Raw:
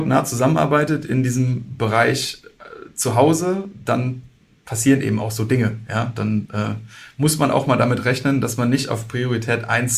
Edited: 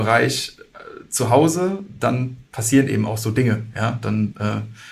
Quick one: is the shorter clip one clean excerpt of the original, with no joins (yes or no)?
no